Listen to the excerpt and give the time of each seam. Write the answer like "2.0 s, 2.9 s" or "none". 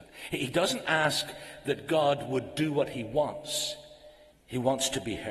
4.3 s